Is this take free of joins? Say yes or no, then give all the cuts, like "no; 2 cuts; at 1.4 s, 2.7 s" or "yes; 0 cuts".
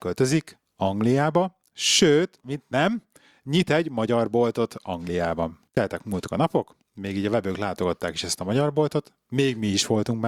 no; 1 cut; at 5.7 s